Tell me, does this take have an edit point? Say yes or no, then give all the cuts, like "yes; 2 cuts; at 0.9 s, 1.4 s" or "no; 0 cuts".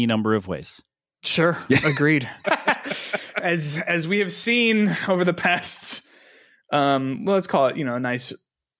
yes; 1 cut; at 2.4 s